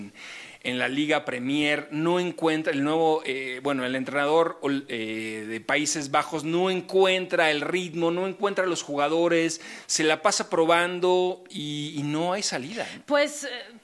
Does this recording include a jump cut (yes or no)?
no